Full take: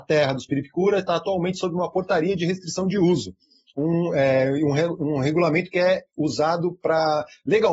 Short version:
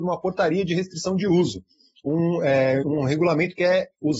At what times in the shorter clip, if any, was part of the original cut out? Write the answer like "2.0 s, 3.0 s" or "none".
2.8 s